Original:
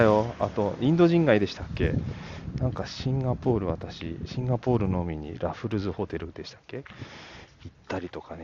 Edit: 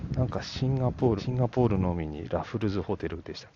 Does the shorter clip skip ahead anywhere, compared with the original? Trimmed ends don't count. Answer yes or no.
yes